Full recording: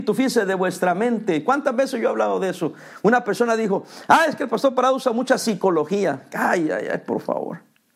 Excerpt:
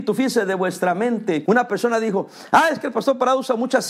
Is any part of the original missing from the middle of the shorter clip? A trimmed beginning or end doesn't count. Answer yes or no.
yes